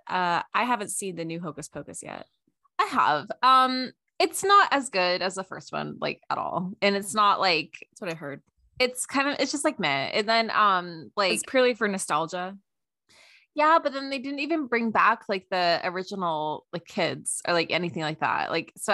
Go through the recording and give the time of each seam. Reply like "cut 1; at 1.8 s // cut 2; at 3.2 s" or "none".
none